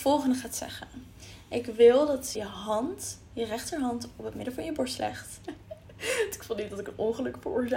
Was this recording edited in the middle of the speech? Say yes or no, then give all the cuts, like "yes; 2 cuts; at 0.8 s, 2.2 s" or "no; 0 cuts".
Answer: yes; 2 cuts; at 2.3 s, 5.4 s